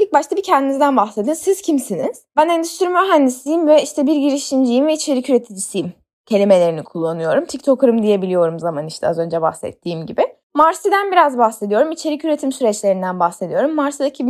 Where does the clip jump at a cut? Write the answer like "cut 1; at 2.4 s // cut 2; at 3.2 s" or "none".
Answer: cut 1; at 8.6 s